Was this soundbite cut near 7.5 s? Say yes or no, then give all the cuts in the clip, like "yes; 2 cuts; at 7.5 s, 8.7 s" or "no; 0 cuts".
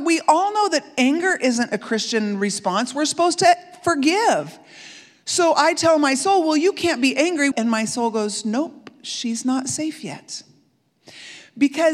yes; 1 cut; at 7.5 s